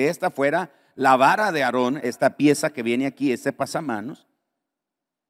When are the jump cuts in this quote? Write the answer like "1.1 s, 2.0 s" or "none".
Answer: 2.0 s